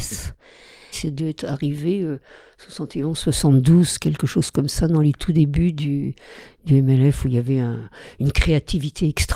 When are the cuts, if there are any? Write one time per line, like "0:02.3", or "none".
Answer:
0:00.9